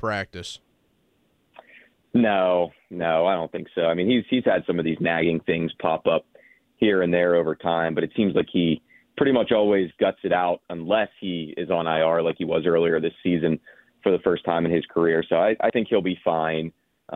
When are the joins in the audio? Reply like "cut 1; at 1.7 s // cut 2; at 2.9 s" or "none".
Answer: none